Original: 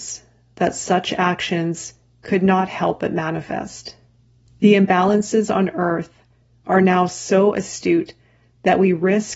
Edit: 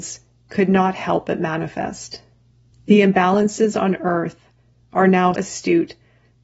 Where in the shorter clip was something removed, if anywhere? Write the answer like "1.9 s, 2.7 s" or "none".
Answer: 5.3 s